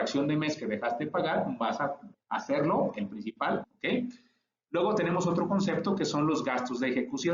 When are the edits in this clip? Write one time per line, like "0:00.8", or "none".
0:02.1
0:03.6